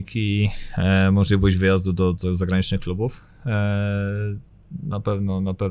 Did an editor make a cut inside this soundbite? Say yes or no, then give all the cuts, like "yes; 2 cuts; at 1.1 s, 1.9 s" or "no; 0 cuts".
no; 0 cuts